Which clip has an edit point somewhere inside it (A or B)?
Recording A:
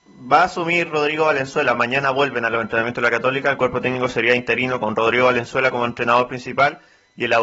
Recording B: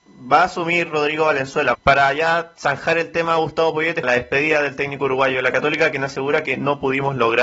B